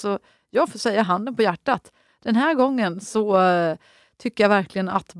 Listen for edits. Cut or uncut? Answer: uncut